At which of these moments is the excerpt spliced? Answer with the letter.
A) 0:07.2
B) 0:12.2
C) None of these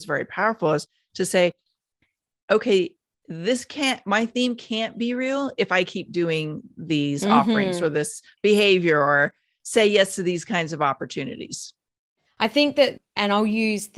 B